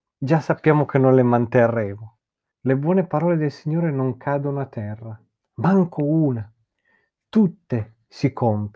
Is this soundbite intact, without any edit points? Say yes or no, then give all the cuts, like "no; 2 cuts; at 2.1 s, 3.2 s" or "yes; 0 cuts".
no; 1 cut; at 2.5 s